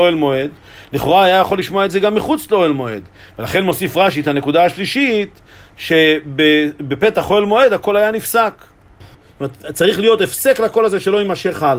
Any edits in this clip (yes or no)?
yes